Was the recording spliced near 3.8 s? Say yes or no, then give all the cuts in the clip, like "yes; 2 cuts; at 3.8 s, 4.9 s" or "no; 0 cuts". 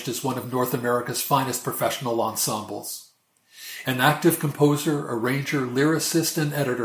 yes; 1 cut; at 3.8 s